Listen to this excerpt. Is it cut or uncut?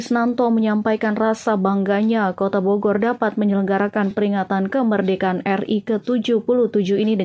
uncut